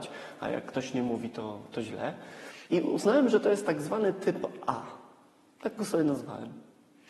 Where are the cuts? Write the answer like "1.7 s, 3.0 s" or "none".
2.7 s

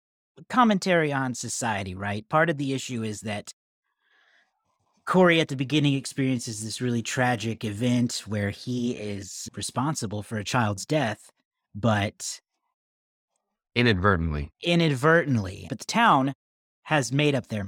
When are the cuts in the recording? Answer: 15.7 s

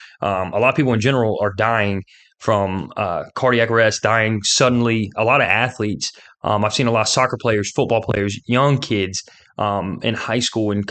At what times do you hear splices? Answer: none

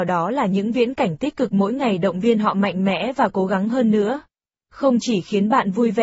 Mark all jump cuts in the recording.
4.6 s

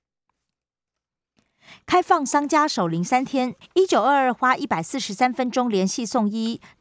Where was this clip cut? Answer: 3.6 s

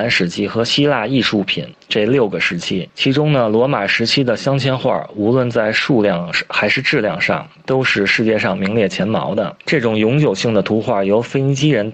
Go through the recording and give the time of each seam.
9.6 s

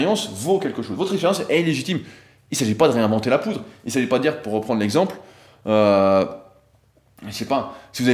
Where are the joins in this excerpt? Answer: none

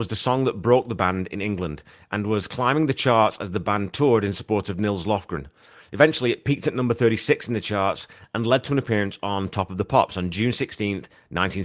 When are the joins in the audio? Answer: none

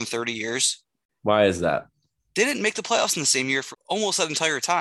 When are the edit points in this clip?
1.2 s, 3.7 s

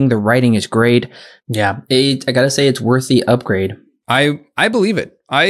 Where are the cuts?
1.4 s

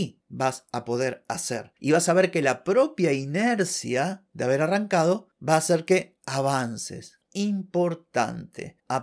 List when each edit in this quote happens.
1.7 s

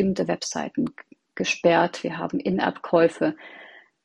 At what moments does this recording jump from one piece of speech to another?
none

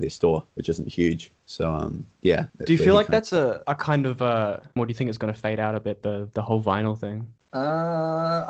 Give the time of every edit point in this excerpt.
4.8 s

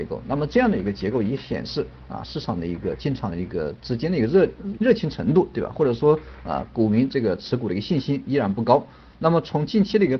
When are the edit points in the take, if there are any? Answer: 4.8 s

